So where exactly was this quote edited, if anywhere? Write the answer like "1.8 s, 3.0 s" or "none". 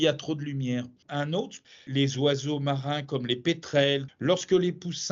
1.0 s, 4.1 s